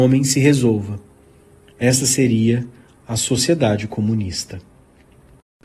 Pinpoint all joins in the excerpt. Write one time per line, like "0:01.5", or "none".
none